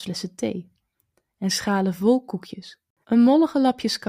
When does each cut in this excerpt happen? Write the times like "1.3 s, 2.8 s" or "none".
3.0 s